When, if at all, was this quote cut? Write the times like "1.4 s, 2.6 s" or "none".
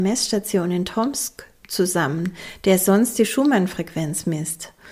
none